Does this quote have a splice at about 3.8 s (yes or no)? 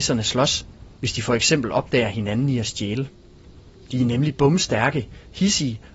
yes